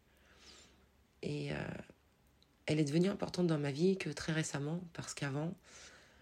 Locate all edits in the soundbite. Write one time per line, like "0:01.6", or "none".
0:01.1